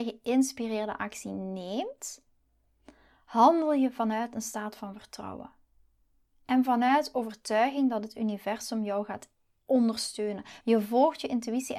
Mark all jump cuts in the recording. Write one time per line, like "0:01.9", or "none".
0:10.6

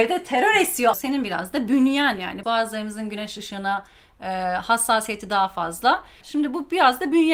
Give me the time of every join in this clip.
0:00.9
0:02.4
0:06.2

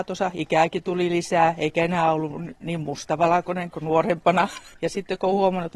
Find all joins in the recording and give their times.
0:04.7

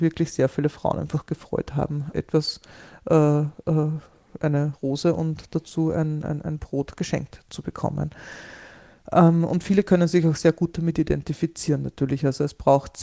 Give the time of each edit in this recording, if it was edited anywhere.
0:02.1

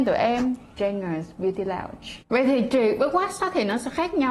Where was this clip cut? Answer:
0:02.2

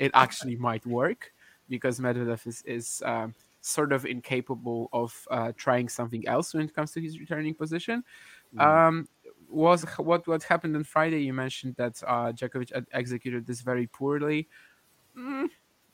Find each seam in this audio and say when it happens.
none

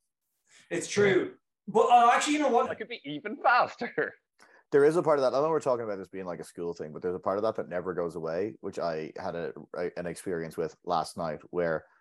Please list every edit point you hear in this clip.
0:02.7

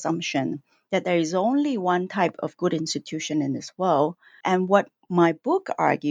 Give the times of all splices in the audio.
0:04.4

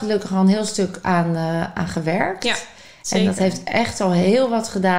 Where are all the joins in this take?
none

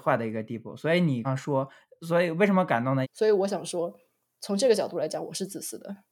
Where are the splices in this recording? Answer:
0:01.2
0:03.0

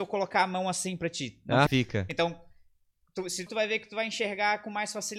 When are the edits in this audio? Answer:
0:01.7
0:03.5

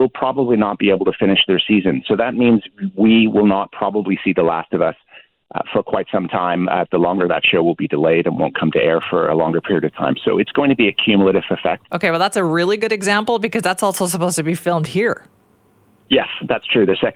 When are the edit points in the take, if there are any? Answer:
0:06.9
0:11.9

